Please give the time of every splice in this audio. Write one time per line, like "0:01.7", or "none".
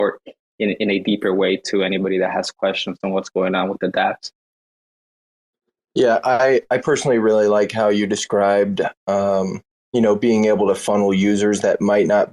none